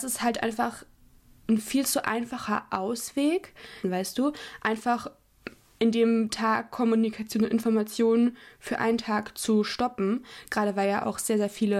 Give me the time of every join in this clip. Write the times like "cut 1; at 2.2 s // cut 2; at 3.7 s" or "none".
cut 1; at 3.8 s

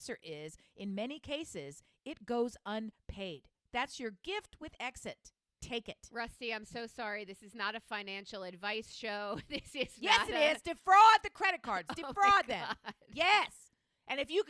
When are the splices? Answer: cut 1; at 3.7 s

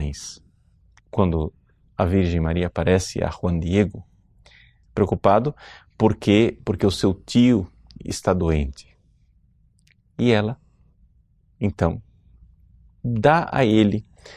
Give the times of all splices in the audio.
cut 1; at 1.0 s // cut 2; at 4.8 s

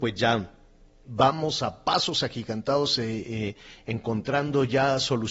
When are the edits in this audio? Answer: cut 1; at 1.0 s

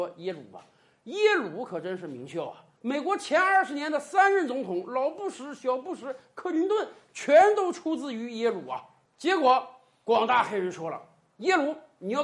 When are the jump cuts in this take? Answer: none

